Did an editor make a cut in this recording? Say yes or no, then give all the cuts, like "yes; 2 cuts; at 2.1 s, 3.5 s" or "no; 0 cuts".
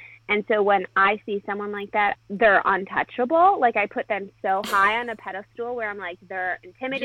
yes; 1 cut; at 2.2 s